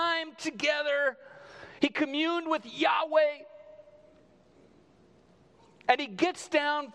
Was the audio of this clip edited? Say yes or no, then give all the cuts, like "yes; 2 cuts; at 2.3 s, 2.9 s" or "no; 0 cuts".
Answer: no; 0 cuts